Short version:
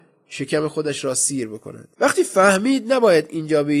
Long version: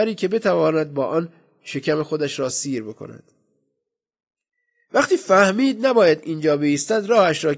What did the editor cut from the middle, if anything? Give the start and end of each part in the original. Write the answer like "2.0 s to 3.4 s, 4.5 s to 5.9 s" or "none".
3.3 s to 4.9 s